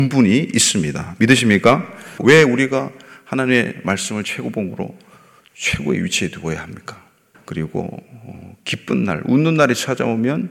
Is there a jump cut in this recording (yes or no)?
yes